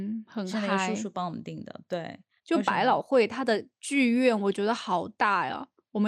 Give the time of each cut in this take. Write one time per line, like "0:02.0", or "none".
0:02.4